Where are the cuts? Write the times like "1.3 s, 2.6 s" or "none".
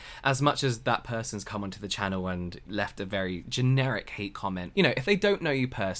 2.6 s, 4.7 s

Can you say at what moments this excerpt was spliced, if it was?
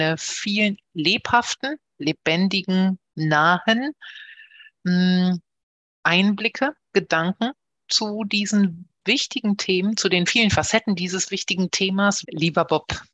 12.2 s

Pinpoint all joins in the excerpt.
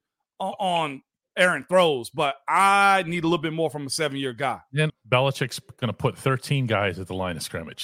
4.9 s

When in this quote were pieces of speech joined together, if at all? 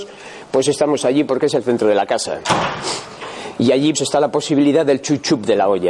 3.9 s

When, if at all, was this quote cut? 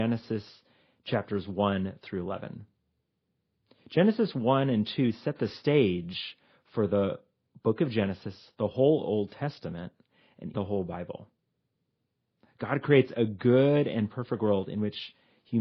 10.5 s

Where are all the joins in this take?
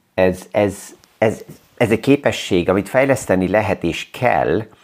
1.5 s

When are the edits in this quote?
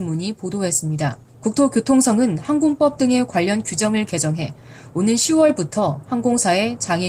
1.3 s

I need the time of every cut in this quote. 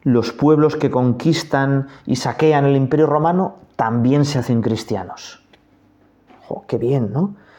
6.3 s

